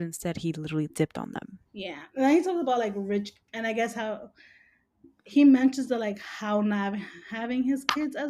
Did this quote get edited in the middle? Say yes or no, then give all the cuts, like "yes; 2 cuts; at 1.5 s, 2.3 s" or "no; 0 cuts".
yes; 2 cuts; at 1.7 s, 3.5 s